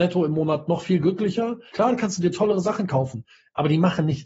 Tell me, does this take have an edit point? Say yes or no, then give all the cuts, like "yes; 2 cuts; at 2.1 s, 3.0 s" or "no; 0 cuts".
yes; 1 cut; at 1.7 s